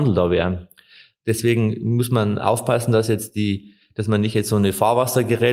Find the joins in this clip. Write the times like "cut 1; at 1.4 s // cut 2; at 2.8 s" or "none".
none